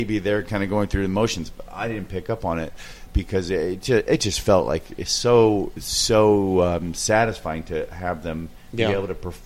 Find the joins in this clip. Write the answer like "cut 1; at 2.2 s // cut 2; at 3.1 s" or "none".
cut 1; at 3.1 s